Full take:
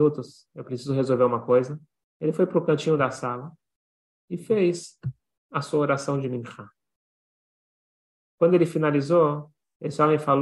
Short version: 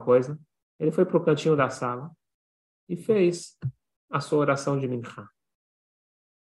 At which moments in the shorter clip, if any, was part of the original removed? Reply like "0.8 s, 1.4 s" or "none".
none